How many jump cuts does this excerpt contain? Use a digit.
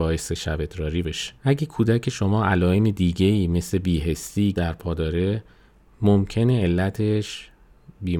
2